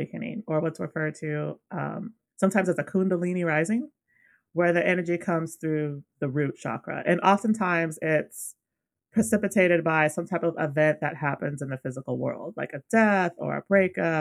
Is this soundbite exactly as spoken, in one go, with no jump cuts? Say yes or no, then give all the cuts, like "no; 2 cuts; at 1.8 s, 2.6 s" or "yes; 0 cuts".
yes; 0 cuts